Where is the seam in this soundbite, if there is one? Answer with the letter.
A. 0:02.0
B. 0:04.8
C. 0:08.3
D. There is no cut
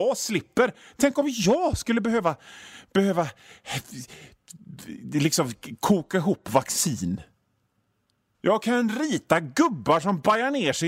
C